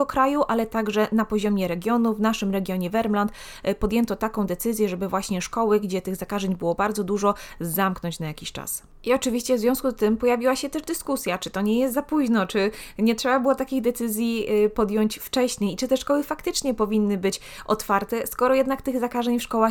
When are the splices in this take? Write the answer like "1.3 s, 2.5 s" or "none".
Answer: none